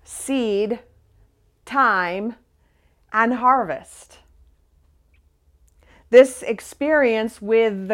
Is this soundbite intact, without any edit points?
yes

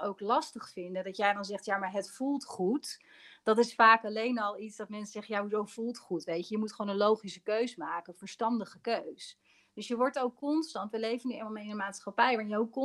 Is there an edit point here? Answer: no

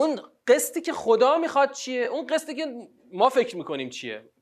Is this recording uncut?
yes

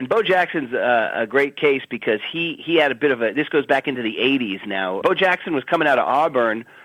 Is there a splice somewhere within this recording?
yes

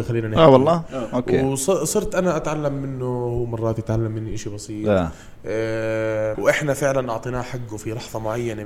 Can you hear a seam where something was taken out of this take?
yes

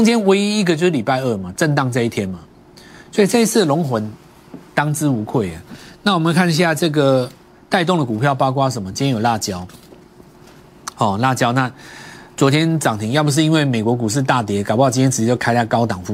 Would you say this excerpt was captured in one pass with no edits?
yes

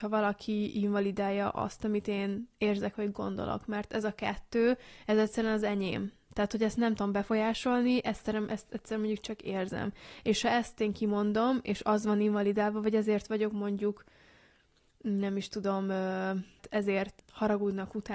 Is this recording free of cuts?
yes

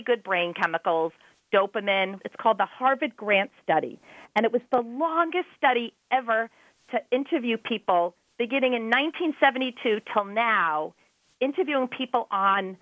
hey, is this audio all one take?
no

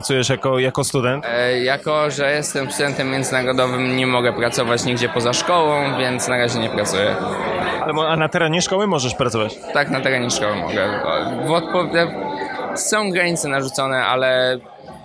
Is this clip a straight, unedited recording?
yes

